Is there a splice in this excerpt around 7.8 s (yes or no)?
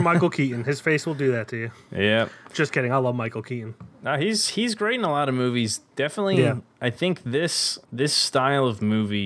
yes